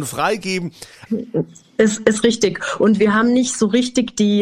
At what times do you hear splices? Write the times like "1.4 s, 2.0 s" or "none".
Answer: 1.1 s